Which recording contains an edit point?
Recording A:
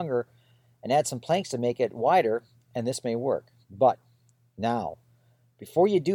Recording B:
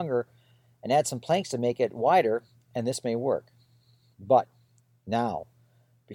A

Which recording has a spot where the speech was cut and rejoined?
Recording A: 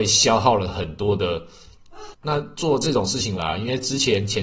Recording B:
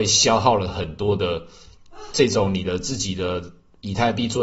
A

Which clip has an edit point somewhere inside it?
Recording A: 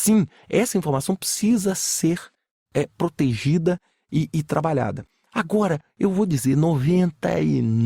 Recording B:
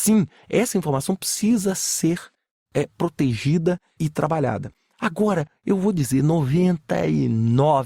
B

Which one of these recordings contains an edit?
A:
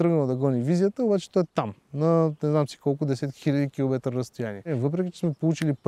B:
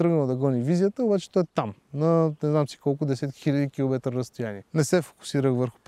B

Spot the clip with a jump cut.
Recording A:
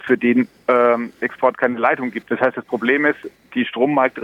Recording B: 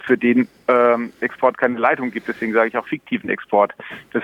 A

